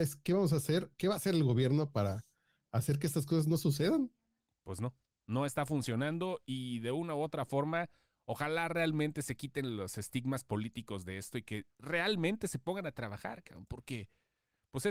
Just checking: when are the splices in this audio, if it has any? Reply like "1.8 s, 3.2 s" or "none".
4.5 s